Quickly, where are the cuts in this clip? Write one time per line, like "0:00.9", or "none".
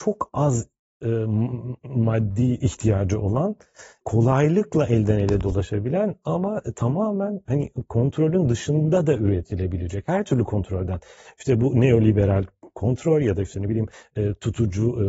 none